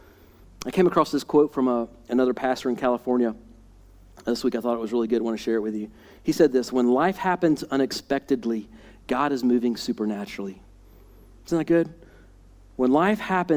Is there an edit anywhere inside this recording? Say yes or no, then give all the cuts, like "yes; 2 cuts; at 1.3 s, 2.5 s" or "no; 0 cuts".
no; 0 cuts